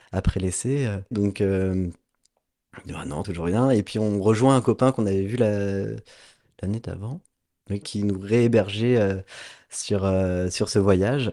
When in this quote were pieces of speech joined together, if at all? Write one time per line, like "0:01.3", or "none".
0:01.1
0:03.2
0:07.8